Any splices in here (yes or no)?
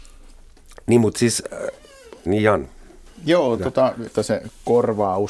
yes